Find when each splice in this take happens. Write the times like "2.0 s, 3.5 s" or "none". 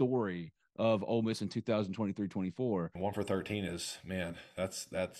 3.0 s